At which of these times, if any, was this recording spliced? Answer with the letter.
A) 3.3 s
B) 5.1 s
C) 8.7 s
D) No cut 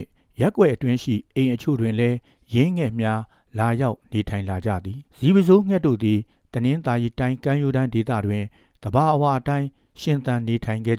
B